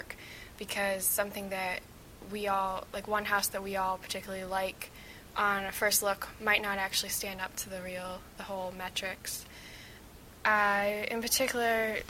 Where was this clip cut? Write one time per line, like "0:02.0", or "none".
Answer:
none